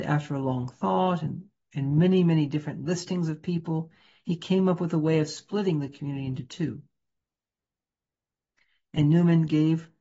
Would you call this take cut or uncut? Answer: uncut